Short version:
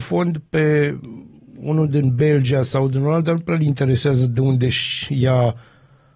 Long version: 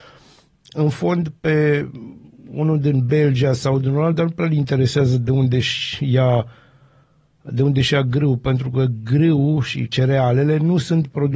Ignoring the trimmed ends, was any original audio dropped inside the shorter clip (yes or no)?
no